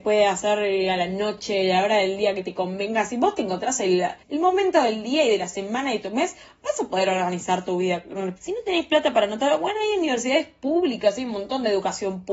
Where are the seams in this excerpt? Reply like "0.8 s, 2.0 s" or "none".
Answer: 4.2 s, 8.4 s